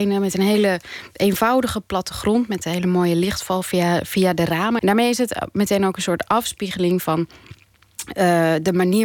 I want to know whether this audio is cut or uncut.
cut